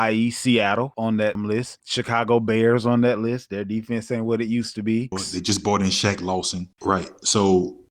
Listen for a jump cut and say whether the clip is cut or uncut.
cut